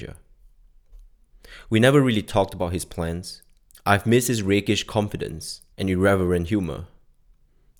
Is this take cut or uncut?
cut